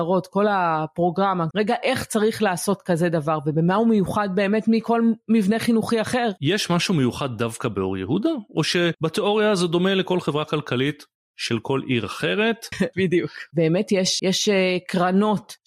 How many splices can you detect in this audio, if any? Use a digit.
3